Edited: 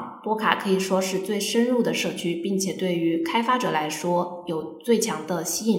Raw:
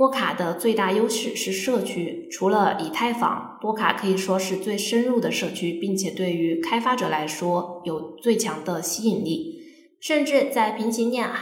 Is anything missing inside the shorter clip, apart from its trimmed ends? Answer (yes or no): no